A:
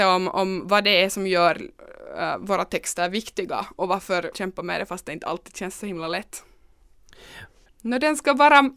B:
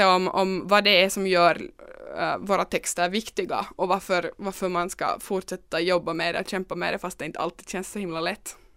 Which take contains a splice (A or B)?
A